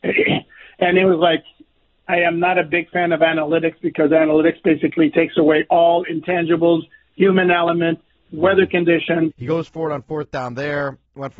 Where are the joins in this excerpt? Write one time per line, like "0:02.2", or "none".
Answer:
0:08.2
0:09.3